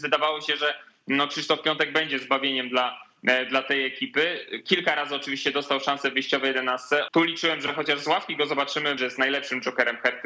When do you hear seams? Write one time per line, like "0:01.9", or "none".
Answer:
0:07.1
0:09.0

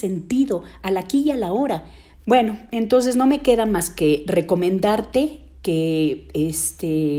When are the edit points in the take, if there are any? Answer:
0:02.1

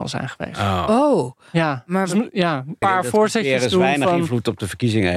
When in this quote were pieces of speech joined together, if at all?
0:02.8

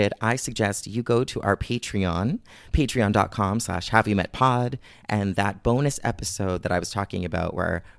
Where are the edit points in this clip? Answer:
none

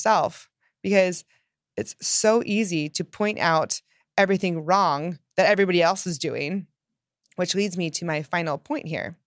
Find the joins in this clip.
none

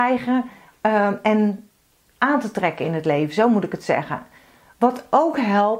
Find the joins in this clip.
none

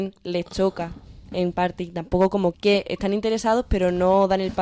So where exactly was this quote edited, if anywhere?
0:02.5

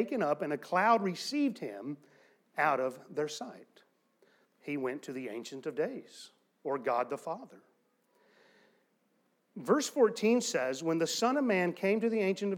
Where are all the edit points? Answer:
0:04.5

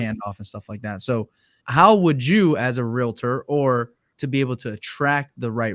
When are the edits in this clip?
0:01.6
0:04.1

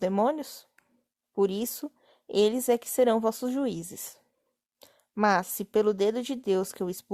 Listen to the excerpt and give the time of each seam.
0:01.2

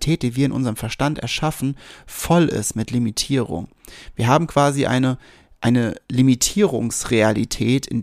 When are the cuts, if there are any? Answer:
none

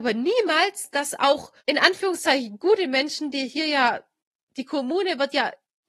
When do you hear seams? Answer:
none

